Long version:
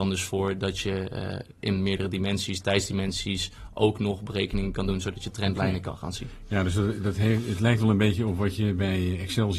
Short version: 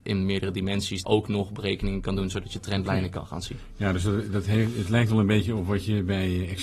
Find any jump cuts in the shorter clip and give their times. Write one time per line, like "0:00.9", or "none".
0:01.0